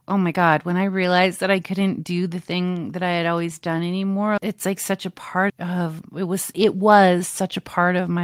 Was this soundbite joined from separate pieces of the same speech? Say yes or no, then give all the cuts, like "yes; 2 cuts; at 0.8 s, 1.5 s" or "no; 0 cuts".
yes; 2 cuts; at 4.4 s, 5.5 s